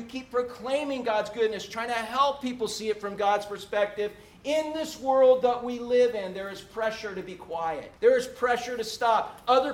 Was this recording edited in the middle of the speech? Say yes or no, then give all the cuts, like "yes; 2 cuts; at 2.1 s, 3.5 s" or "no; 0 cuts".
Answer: yes; 1 cut; at 8.0 s